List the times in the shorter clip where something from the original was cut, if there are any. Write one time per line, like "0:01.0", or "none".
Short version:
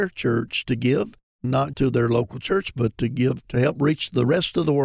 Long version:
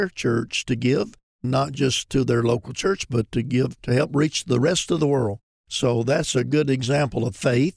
0:01.7